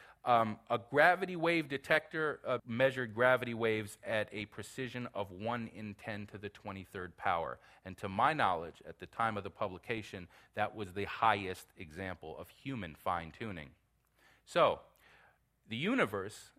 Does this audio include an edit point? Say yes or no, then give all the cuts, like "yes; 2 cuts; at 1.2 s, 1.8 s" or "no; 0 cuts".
yes; 1 cut; at 2.6 s